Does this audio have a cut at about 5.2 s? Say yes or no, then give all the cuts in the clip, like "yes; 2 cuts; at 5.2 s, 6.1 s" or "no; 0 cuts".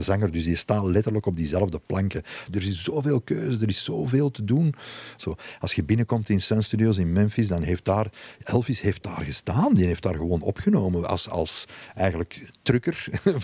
yes; 2 cuts; at 2.5 s, 5.2 s